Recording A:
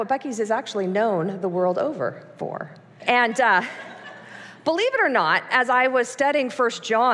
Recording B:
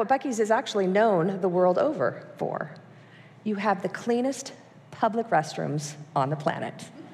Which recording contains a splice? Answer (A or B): A